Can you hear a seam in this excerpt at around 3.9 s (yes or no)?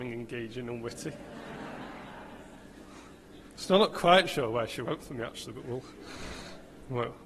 no